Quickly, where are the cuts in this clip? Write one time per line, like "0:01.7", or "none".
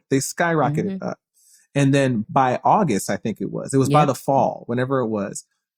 0:02.2

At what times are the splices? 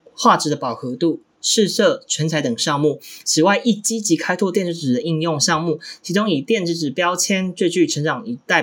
none

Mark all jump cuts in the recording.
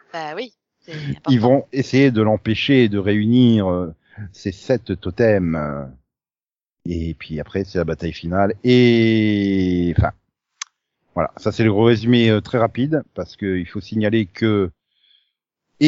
none

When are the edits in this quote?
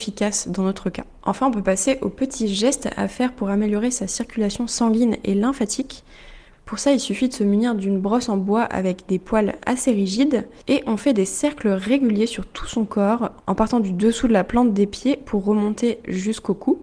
0:01.2
0:06.5

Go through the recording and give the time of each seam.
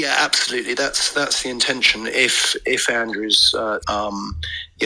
0:03.8

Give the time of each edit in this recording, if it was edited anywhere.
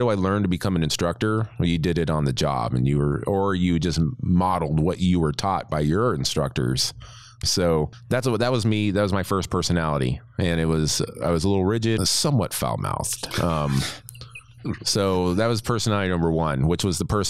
0:07.4
0:12.0

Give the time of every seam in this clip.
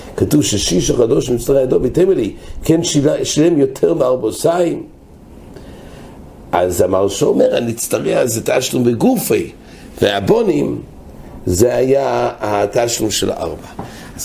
none

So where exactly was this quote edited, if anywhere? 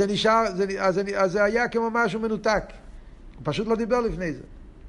0:03.3

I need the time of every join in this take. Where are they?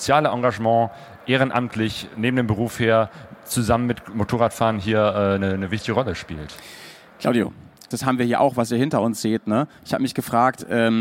0:07.9

